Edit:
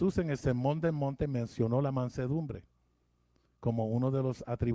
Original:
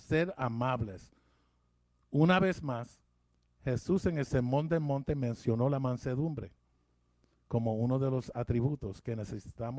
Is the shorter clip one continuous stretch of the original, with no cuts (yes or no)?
yes